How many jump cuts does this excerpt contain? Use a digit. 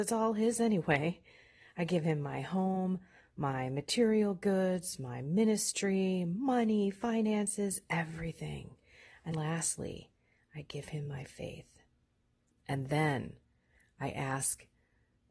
2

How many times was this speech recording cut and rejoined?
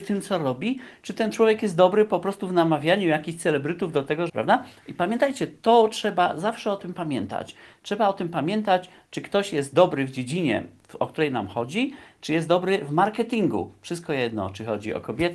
1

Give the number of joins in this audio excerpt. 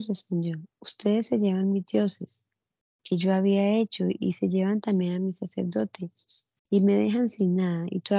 0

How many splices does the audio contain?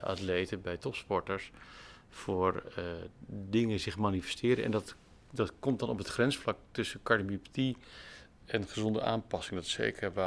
0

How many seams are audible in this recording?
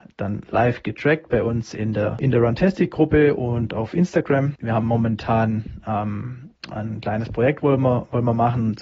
0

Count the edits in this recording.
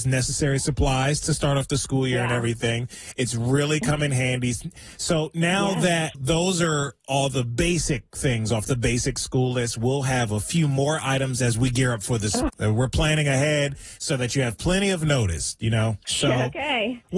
3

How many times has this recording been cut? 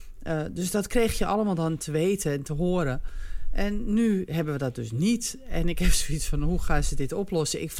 0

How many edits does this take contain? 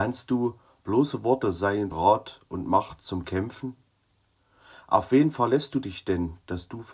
1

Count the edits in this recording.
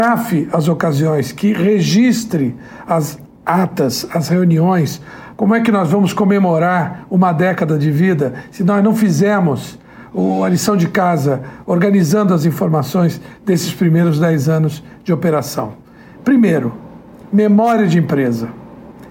2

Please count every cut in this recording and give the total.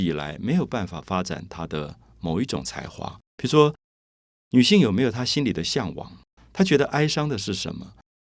1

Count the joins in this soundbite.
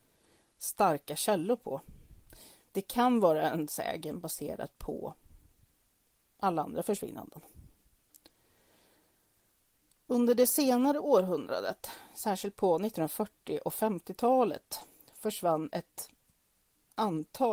0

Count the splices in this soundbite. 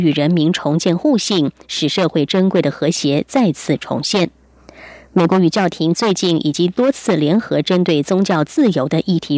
0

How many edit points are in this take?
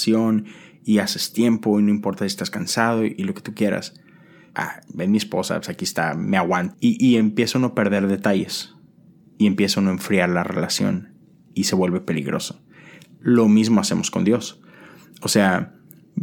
2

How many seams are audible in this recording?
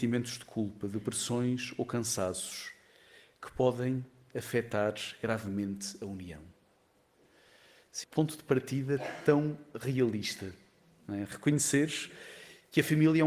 1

